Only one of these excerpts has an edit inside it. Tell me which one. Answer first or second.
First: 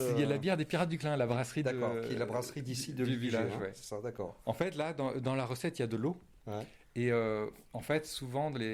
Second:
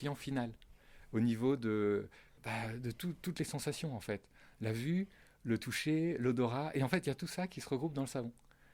second